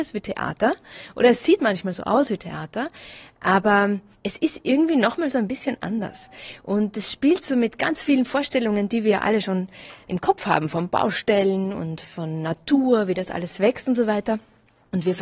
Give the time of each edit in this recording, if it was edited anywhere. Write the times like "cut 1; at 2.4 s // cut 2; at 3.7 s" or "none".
none